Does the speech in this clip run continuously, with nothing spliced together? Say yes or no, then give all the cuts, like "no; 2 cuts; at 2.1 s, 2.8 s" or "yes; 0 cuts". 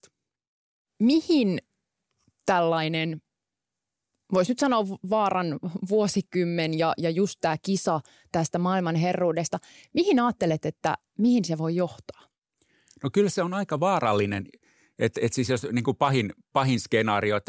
yes; 0 cuts